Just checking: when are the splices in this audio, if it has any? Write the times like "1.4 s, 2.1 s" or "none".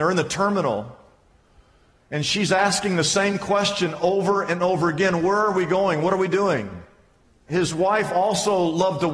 none

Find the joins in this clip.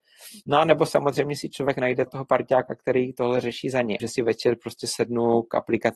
2.1 s, 4.0 s

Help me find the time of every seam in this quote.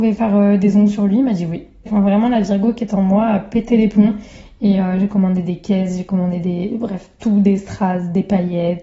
1.9 s

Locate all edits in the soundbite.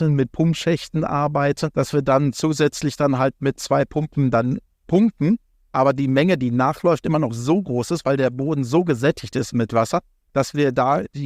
none

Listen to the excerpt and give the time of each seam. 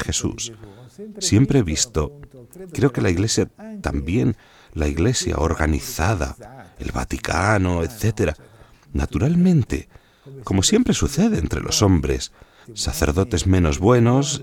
12.6 s

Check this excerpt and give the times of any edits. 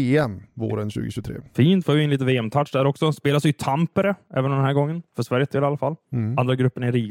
none

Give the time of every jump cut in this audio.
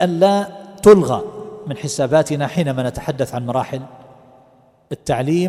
none

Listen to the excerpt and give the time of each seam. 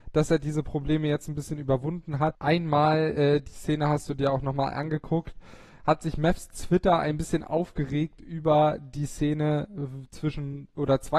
2.4 s

